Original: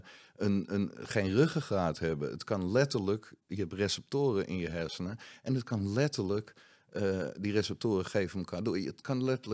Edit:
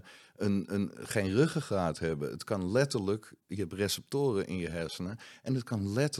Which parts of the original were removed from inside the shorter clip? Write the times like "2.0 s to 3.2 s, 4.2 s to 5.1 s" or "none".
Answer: none